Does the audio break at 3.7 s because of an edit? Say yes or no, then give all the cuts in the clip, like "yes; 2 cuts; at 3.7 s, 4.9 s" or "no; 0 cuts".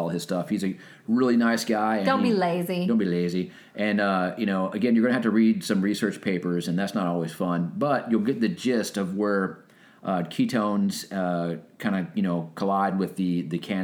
no; 0 cuts